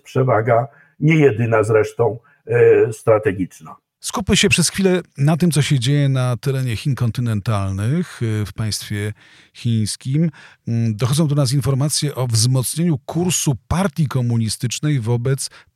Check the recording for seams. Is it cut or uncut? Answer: uncut